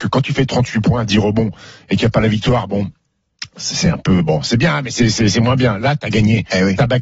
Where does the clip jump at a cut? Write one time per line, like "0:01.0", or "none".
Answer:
none